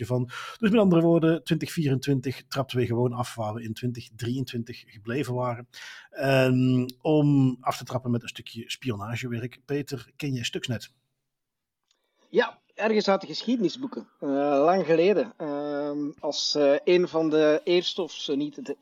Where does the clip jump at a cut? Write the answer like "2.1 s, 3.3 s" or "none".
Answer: none